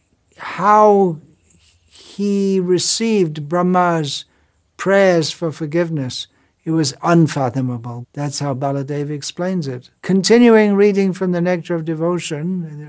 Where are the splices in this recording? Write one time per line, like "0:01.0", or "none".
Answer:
0:08.0
0:10.0

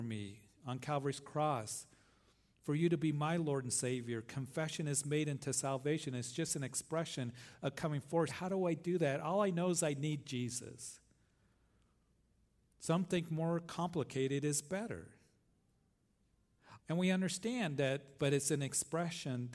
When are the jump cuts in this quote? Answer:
0:08.3
0:16.8
0:18.2

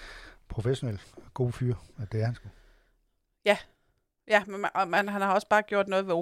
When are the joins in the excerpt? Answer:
none

